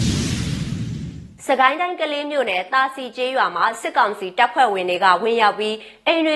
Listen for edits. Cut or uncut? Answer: uncut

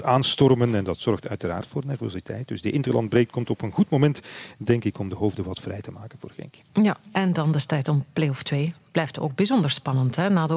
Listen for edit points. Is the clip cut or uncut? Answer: uncut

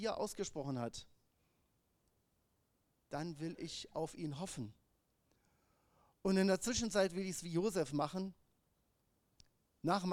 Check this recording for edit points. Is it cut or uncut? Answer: uncut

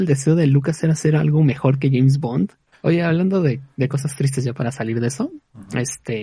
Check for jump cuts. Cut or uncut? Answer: cut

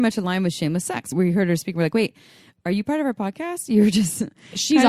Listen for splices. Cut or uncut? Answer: cut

